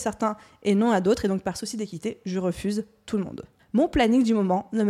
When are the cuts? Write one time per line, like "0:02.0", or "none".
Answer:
0:03.6